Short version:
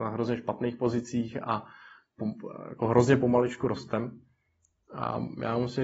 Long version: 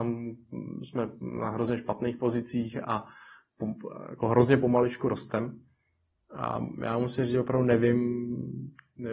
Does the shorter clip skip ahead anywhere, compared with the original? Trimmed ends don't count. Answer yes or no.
no